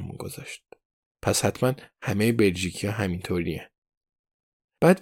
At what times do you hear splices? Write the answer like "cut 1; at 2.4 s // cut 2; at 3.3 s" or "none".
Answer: cut 1; at 1.2 s